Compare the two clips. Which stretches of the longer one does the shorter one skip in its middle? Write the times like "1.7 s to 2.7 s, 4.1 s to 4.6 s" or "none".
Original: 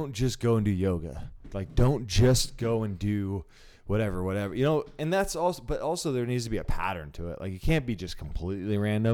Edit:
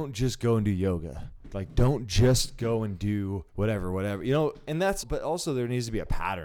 3.5 s to 3.8 s, 5.3 s to 5.6 s